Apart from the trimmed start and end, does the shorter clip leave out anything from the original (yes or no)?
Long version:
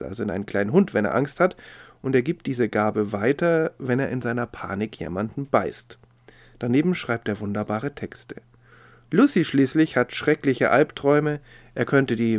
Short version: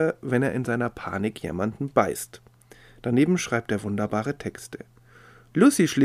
no